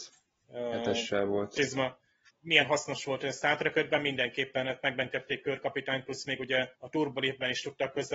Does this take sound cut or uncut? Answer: cut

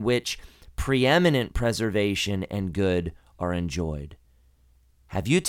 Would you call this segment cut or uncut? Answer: uncut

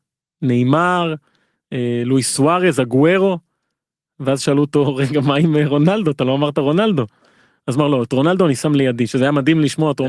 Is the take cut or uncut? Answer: uncut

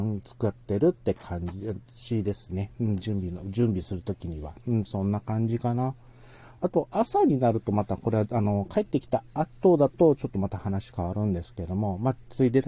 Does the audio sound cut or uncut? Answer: uncut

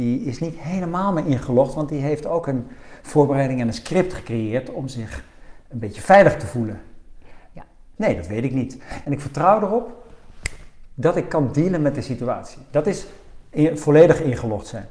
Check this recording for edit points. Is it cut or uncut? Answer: cut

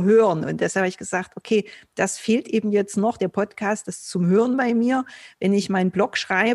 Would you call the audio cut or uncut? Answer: uncut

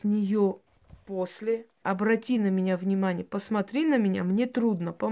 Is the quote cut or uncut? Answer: cut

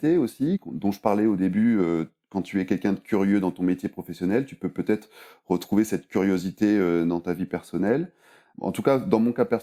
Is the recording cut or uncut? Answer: uncut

